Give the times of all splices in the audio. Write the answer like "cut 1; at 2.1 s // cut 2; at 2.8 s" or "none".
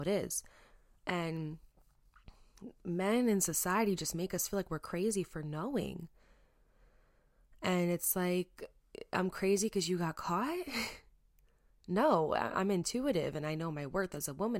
none